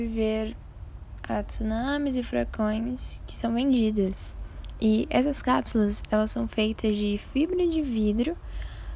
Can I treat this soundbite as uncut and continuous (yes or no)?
yes